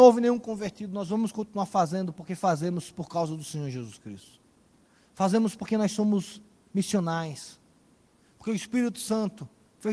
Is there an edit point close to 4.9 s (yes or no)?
no